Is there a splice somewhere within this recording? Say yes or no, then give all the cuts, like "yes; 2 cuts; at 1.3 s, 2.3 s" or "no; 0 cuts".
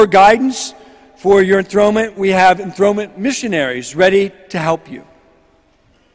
no; 0 cuts